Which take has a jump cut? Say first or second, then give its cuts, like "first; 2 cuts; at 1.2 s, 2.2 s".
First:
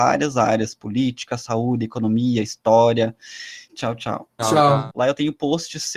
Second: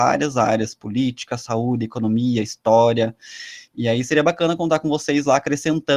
first; 2 cuts; at 3.7 s, 4.9 s